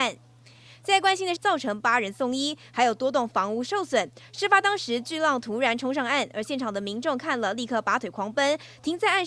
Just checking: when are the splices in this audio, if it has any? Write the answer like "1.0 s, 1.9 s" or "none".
1.4 s